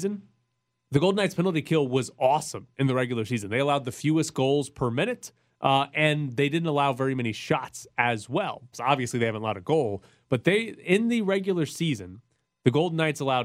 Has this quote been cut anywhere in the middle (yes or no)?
yes